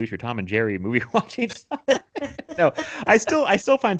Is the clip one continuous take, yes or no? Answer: yes